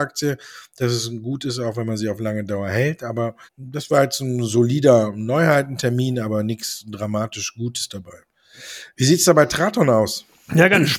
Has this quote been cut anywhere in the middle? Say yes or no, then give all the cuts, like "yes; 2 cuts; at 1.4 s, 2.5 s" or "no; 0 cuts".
yes; 1 cut; at 3.5 s